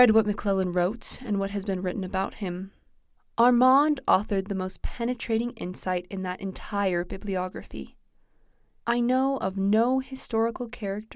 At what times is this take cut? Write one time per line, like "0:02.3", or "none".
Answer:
0:08.8